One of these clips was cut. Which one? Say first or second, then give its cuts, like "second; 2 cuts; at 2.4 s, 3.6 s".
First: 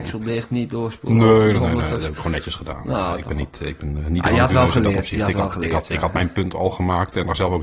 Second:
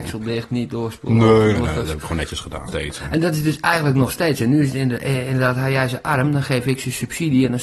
second; 2 cuts; at 1.5 s, 2.7 s